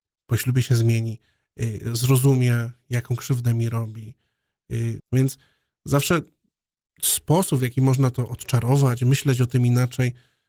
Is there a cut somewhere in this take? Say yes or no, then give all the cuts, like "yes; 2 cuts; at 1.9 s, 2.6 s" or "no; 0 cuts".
yes; 1 cut; at 5.0 s